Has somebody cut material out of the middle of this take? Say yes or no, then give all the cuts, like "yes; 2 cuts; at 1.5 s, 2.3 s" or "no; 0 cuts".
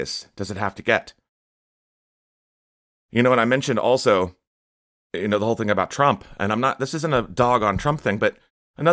no; 0 cuts